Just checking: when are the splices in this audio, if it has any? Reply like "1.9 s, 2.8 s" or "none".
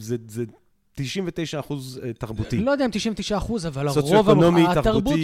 none